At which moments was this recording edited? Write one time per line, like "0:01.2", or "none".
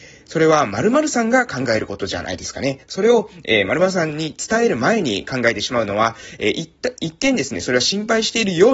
0:02.8